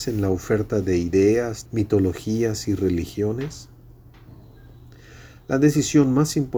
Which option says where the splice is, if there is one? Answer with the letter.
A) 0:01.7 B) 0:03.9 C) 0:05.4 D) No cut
A